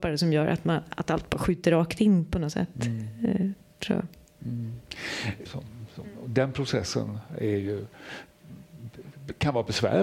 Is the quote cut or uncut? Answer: cut